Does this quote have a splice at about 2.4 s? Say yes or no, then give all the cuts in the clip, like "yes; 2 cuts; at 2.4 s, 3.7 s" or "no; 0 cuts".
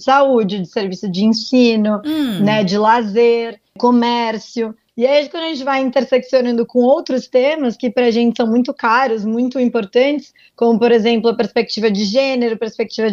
no; 0 cuts